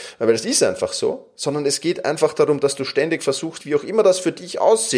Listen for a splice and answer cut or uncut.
cut